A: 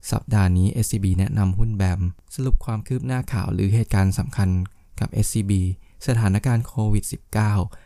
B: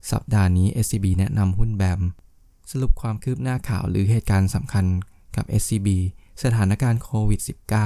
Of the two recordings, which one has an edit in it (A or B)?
A